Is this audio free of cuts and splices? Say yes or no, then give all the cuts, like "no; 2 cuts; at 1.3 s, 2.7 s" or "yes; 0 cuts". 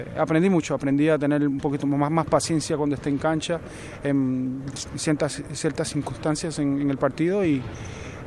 yes; 0 cuts